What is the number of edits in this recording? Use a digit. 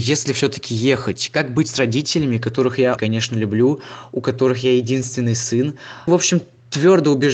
2